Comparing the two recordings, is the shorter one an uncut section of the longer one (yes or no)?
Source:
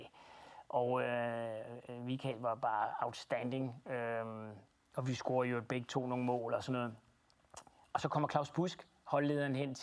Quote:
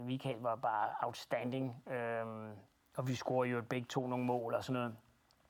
yes